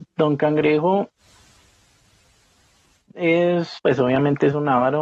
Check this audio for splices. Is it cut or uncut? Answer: cut